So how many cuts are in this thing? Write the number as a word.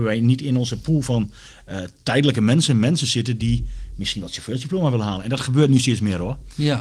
zero